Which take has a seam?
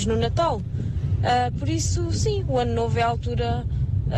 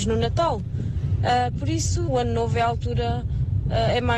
second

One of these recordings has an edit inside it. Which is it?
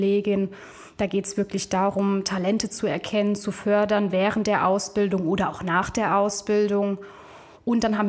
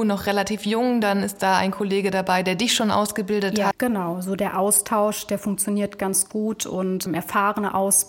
second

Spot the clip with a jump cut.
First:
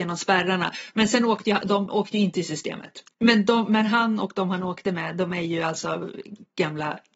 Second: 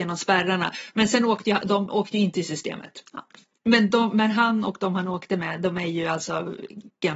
first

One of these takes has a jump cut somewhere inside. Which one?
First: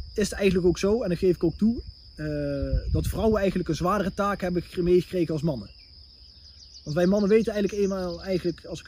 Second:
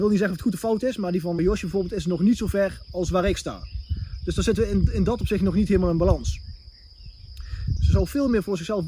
second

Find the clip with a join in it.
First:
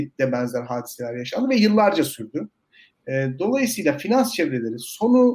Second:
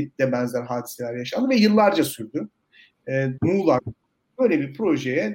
second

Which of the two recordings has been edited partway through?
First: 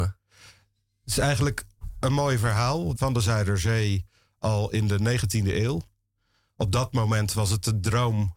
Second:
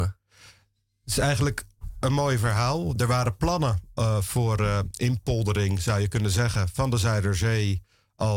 first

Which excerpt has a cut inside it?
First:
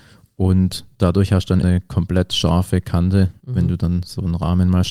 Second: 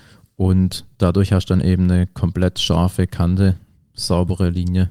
first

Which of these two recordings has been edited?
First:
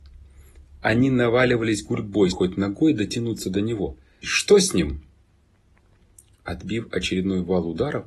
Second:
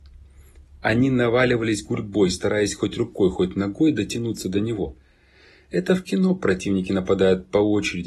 first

